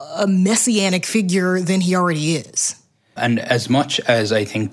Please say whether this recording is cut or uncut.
cut